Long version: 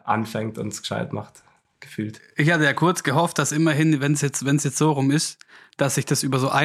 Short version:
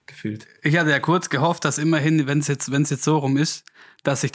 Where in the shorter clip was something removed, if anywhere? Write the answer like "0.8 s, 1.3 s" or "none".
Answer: none